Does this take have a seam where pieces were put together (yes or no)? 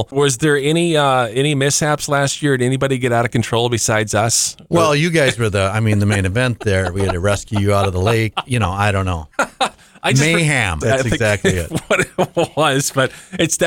yes